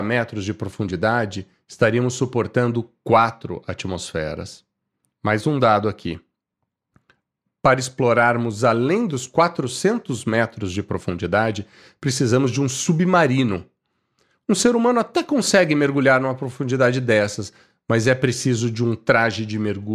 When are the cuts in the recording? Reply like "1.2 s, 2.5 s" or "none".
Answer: none